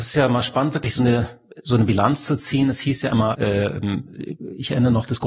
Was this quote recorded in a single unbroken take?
no; 1 cut; at 3.3 s

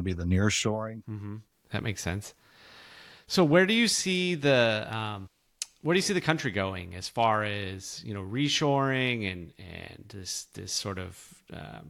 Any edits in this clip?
yes; 1 cut; at 1.5 s

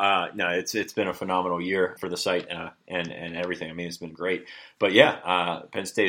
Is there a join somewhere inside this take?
yes; 1 cut; at 2.0 s

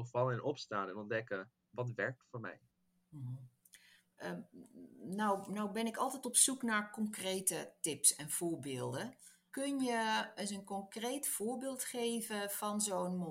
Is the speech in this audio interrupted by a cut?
no; 0 cuts

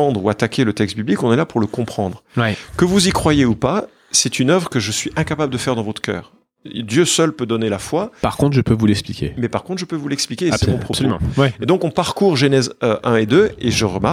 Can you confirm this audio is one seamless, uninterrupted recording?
yes; 0 cuts

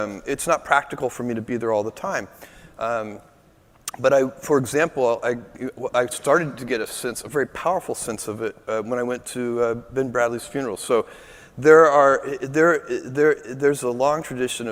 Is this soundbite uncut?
yes; 0 cuts

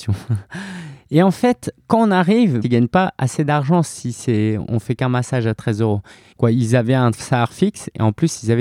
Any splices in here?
yes; 2 cuts; at 2.6 s, 6.3 s

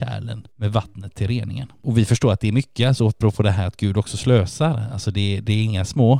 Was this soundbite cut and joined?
no; 0 cuts

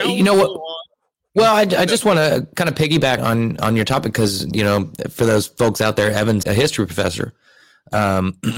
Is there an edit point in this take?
yes; 2 cuts; at 3.2 s, 6.4 s

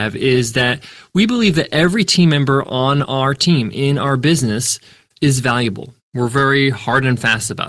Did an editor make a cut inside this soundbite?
yes; 1 cut; at 6.0 s

